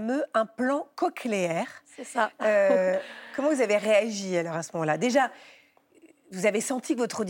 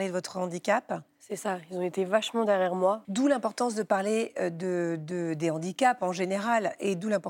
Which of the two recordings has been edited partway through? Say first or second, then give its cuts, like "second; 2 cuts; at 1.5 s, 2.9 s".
second; 1 cut; at 3.0 s